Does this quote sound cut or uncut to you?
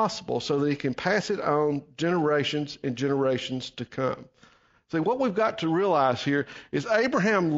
uncut